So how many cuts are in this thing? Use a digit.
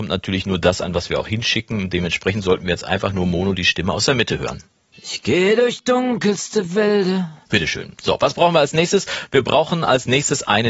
0